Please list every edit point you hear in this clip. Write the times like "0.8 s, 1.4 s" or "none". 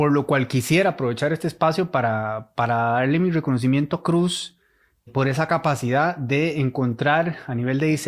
5.1 s